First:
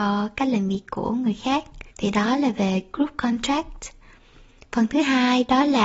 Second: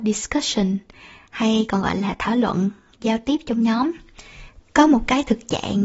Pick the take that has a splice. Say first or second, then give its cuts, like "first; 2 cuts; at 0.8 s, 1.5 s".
first; 1 cut; at 1.9 s